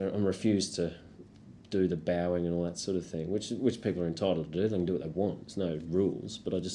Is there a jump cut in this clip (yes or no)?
no